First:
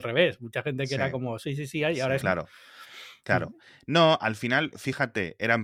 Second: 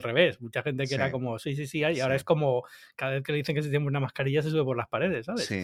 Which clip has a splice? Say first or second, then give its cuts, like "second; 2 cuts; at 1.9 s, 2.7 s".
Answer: first; 1 cut; at 2.2 s